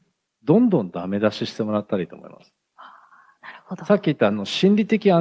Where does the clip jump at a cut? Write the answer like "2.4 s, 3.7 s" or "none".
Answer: none